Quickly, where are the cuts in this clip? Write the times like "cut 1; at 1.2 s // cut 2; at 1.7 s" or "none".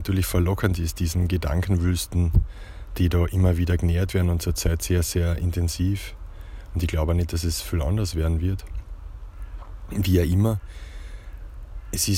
none

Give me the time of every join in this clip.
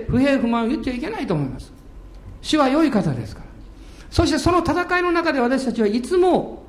cut 1; at 2.4 s

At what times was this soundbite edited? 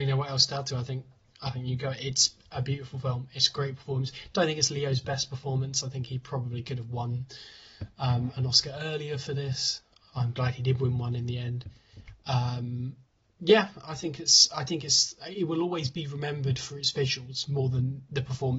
none

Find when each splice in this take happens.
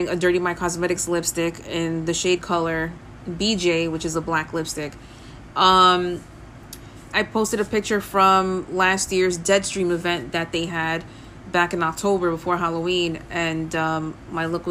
cut 1; at 5.5 s // cut 2; at 7.1 s

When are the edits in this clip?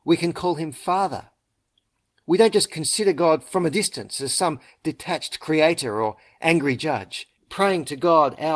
cut 1; at 7.4 s

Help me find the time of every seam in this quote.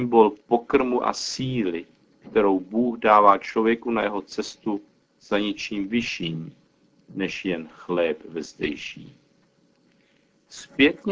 none

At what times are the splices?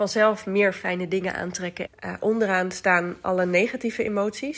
cut 1; at 1.9 s

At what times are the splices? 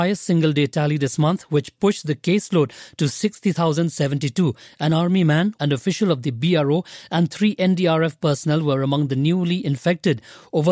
cut 1; at 5.6 s

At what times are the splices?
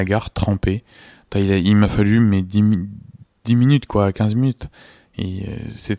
none

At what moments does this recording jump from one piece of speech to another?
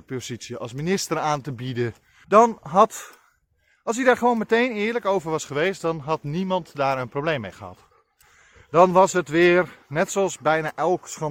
cut 1; at 2.2 s

